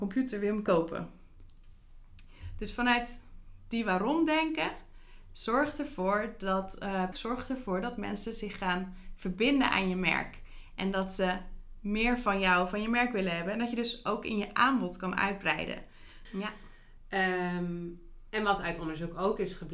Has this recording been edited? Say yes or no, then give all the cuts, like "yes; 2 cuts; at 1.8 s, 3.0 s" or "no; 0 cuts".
yes; 2 cuts; at 7.1 s, 16.3 s